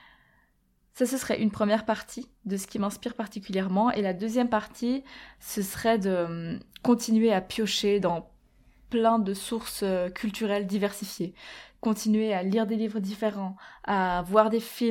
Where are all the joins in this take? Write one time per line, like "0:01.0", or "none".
none